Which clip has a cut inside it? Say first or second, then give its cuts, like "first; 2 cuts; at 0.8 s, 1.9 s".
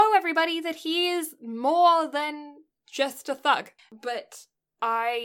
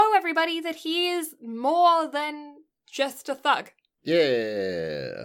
first; 1 cut; at 3.8 s